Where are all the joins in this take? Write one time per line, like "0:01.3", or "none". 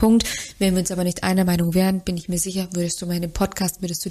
none